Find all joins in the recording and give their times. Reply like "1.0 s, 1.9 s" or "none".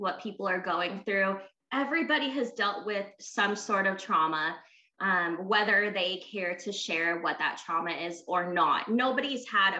none